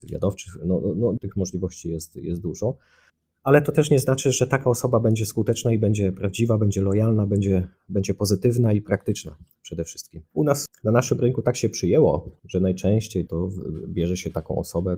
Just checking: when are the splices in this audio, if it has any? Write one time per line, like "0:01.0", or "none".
0:01.2
0:10.3
0:13.3